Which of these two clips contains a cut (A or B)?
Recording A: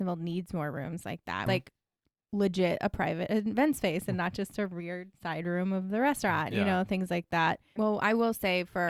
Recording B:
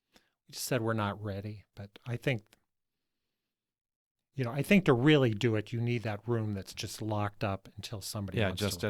A